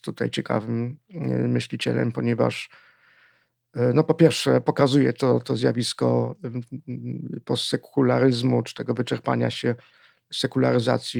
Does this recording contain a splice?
no; 0 cuts

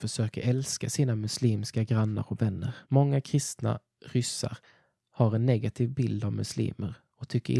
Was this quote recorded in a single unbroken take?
no; 1 cut; at 2.8 s

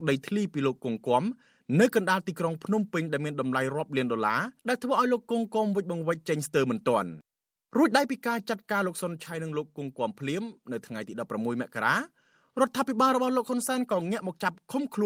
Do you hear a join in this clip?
yes; 1 cut; at 4.6 s

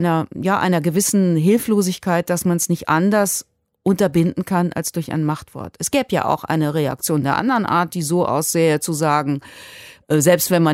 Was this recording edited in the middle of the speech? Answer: no; 0 cuts

